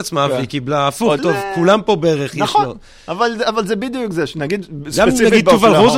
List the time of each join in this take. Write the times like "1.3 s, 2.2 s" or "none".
1.2 s